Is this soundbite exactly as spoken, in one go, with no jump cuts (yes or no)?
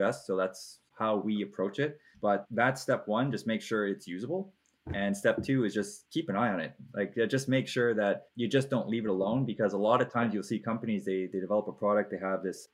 yes